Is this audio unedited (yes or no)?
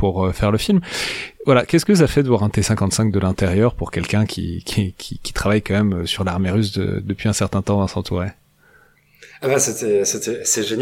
yes